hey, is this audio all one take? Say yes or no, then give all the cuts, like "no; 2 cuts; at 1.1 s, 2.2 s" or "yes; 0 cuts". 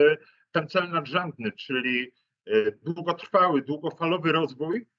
yes; 0 cuts